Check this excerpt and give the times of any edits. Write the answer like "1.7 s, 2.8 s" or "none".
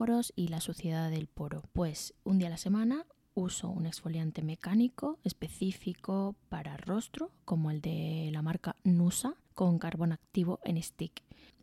1.7 s

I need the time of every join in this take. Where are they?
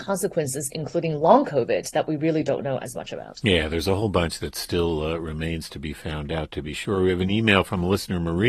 none

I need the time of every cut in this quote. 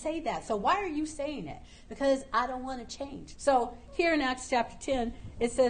3.4 s

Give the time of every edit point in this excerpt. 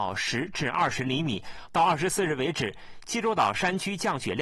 1.7 s

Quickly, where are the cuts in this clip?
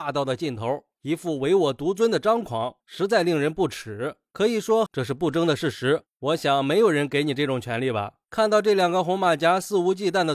4.9 s, 6.1 s, 8.2 s

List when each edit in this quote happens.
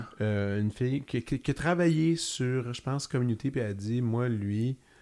none

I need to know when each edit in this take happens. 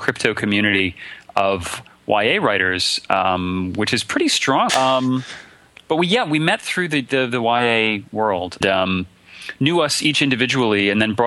4.7 s, 8.6 s

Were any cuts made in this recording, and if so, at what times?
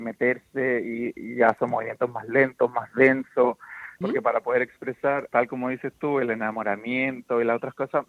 4.0 s, 5.3 s

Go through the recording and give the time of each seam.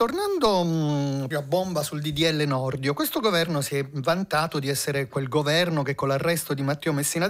1.3 s

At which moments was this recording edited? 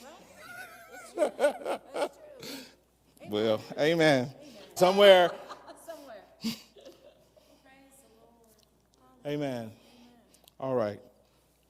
4.8 s

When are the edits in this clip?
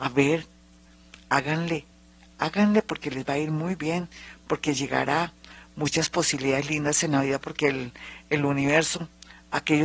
none

